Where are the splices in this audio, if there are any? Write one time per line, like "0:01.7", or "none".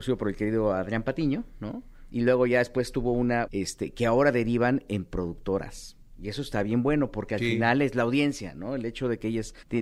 0:03.5